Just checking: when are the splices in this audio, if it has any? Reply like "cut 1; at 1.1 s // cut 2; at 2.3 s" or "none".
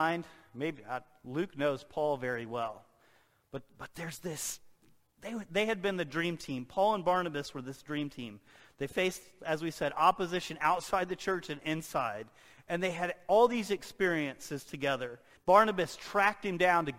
cut 1; at 15.4 s